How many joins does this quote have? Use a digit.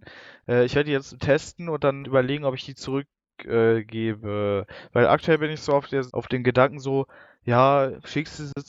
2